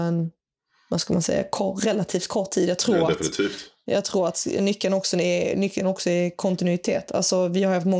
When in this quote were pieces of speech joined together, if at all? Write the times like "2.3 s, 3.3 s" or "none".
none